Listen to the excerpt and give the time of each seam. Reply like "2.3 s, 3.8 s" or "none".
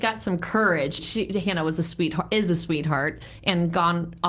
1.0 s